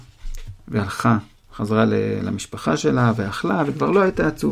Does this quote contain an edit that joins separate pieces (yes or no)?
yes